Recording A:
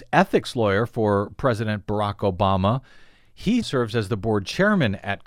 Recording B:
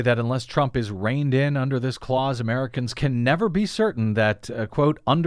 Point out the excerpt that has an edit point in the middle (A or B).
A